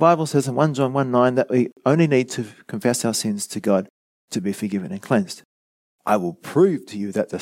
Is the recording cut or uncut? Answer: cut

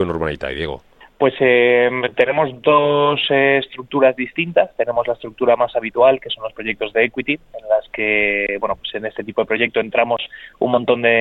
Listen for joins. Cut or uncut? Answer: uncut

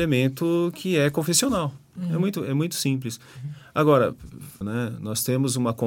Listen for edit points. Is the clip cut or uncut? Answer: cut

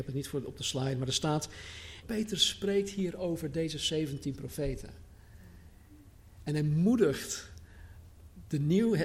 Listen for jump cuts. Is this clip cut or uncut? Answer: cut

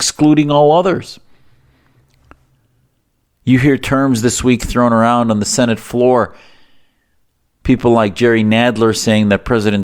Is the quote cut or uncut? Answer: uncut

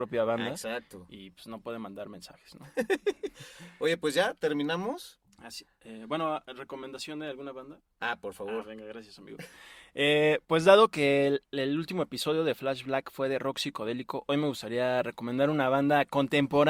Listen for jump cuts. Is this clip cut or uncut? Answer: uncut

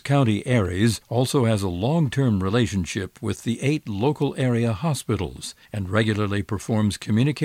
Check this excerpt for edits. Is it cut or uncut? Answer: cut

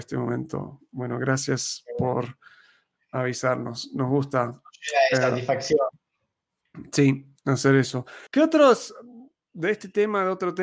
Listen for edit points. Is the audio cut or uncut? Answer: cut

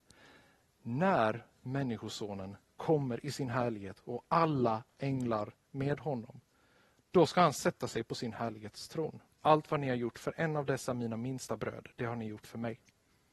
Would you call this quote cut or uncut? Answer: cut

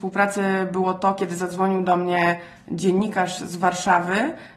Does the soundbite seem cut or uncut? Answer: uncut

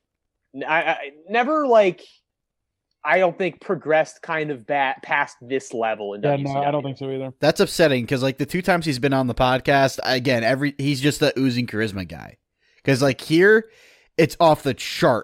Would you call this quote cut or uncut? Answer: uncut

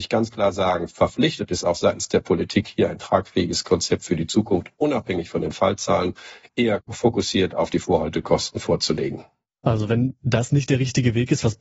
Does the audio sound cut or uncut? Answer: uncut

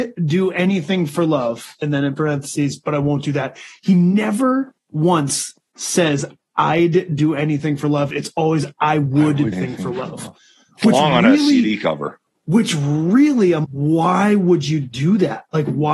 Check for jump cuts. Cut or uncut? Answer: cut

